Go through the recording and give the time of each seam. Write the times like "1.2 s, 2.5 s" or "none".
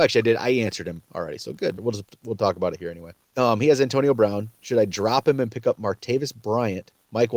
1.8 s